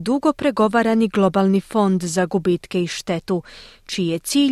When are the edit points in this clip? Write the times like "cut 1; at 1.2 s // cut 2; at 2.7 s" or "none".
none